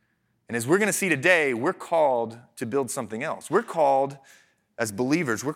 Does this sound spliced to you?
no; 0 cuts

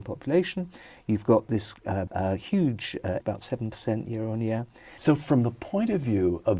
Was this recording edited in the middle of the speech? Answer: yes; 3 cuts; at 2.1 s, 3.2 s, 5.0 s

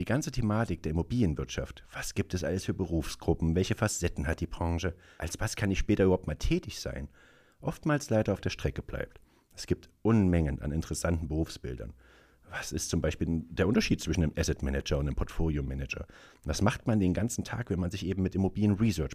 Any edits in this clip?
no; 0 cuts

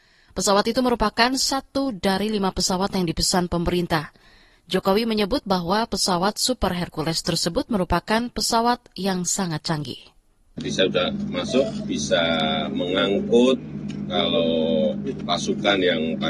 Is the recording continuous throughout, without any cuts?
no; 1 cut; at 11.8 s

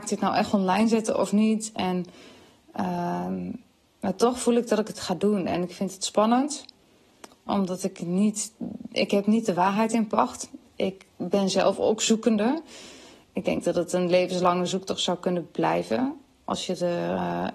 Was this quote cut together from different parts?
yes; 1 cut; at 7.5 s

